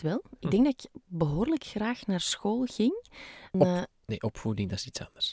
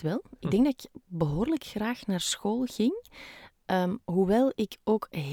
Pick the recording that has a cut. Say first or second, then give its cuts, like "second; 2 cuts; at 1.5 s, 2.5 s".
first; 1 cut; at 3.5 s